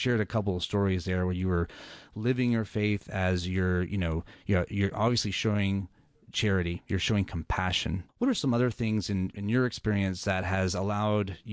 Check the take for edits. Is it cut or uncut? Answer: cut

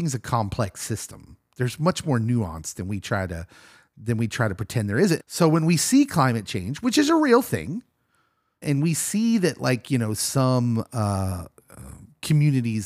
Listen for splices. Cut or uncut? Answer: cut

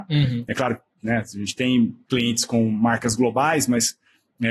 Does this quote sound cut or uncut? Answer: uncut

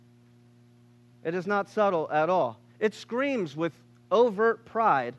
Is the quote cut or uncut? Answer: cut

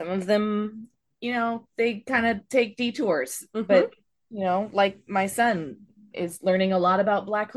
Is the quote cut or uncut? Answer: uncut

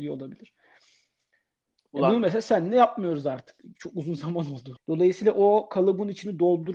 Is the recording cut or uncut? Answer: cut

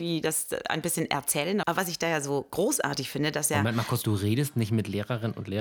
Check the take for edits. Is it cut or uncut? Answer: cut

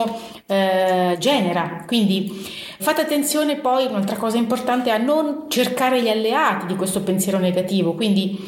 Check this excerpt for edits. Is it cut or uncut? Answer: cut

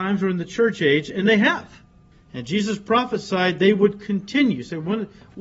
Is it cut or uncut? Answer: cut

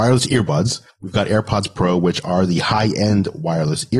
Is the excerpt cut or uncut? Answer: uncut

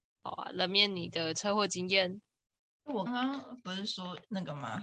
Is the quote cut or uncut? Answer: cut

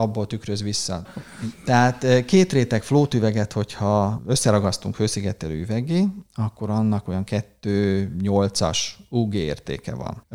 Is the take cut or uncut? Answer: cut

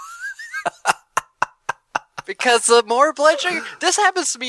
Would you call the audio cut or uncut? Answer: uncut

